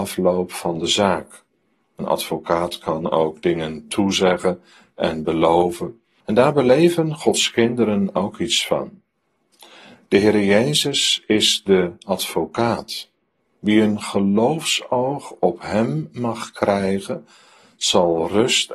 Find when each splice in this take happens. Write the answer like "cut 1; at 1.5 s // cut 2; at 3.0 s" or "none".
cut 1; at 6.2 s